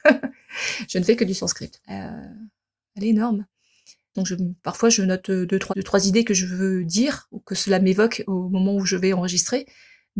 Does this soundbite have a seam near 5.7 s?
yes; 3 cuts; at 1.8 s, 4.1 s, 5.7 s

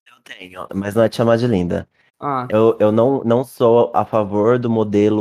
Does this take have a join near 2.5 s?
yes; 1 cut; at 2.5 s

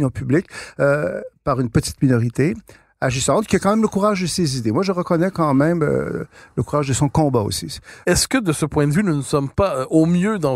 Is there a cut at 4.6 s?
no; 1 cut; at 8.0 s

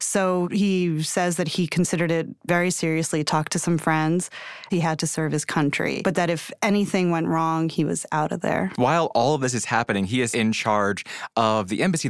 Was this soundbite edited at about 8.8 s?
no; 3 cuts; at 3.3 s, 4.7 s, 10.3 s

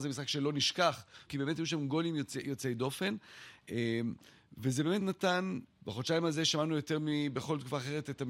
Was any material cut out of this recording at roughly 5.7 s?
yes; 2 cuts; at 1.3 s, 5.7 s

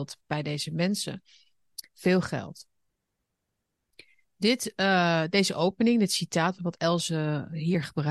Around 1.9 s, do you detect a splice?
yes; 2 cuts; at 1.9 s, 6.5 s

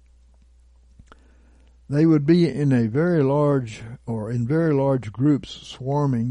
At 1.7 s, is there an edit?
no; 0 cuts

